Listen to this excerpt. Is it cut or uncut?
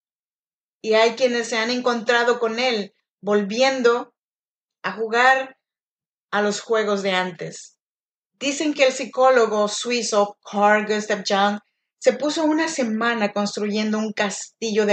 uncut